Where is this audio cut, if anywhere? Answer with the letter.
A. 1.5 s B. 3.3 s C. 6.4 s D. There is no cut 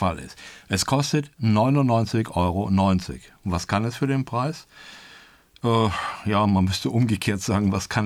D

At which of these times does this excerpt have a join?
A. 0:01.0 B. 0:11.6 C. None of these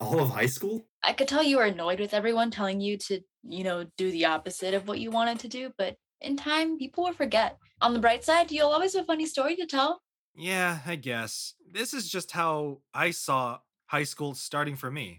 A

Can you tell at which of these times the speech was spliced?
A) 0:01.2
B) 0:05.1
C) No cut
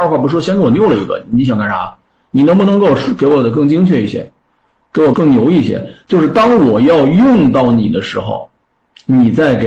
B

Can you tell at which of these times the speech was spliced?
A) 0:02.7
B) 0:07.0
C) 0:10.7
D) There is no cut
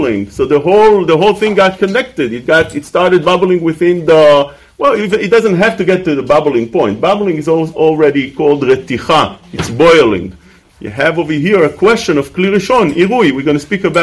C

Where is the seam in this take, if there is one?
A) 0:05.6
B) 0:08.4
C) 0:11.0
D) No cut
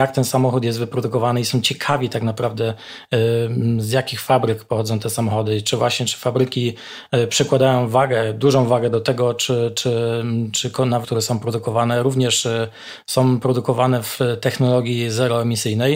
C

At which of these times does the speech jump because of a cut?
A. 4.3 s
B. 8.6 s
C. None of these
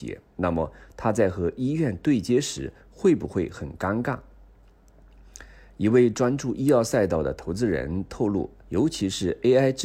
B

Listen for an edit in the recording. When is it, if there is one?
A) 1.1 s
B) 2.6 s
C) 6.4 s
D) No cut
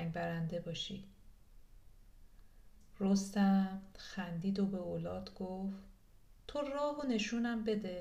C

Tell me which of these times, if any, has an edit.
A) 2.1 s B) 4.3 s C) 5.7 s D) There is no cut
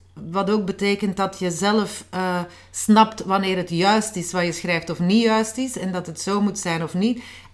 D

